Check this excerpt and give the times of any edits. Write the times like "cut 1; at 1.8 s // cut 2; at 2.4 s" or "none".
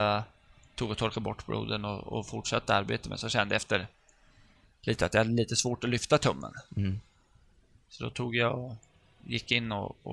none